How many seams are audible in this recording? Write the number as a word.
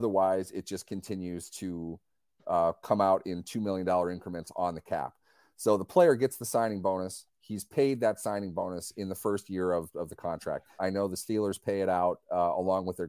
one